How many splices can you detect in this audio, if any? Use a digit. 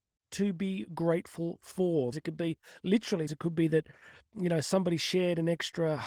2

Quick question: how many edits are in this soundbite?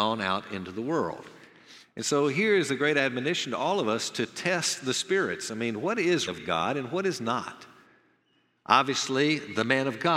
1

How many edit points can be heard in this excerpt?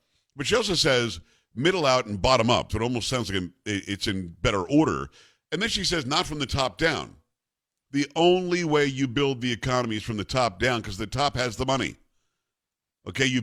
1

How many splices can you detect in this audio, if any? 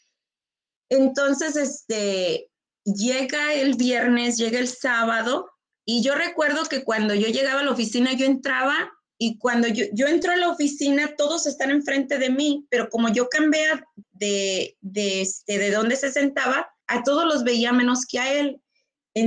3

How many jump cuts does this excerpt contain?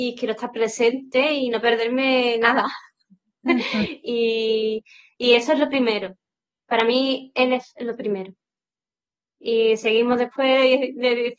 0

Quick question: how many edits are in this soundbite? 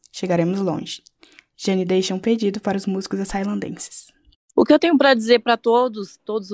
0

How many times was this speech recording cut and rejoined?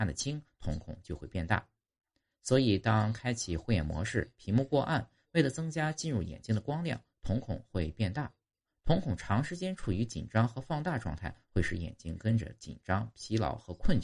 0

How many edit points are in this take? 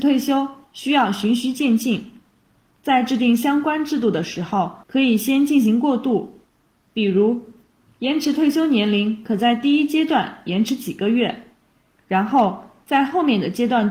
1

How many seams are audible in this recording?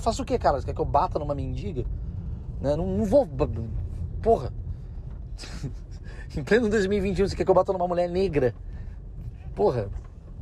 0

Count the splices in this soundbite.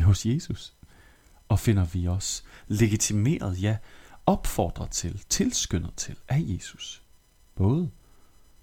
0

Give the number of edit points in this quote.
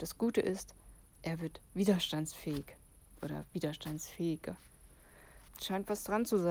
2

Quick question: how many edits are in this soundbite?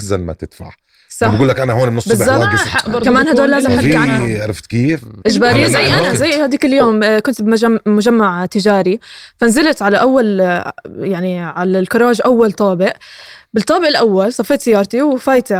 1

